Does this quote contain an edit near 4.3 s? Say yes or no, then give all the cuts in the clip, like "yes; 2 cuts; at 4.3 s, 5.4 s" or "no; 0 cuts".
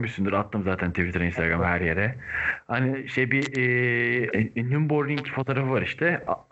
yes; 1 cut; at 4.3 s